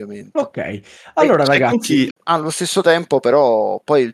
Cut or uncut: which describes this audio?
cut